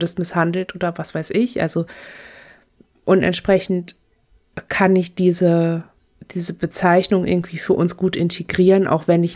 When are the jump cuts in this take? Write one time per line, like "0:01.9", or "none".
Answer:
none